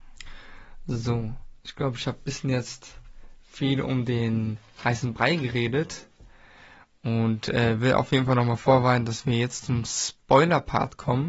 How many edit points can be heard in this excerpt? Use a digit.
0